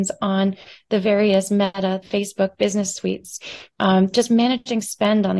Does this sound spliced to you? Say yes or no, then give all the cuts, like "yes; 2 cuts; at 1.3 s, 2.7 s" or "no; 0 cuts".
yes; 1 cut; at 2.0 s